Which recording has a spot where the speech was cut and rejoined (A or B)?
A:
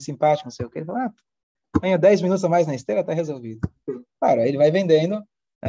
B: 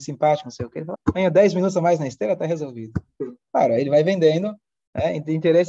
B